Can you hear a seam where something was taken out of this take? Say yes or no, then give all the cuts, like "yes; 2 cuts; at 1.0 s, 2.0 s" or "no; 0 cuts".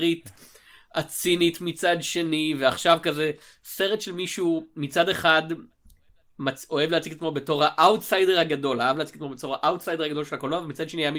no; 0 cuts